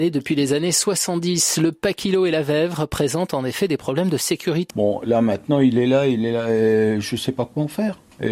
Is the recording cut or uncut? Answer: cut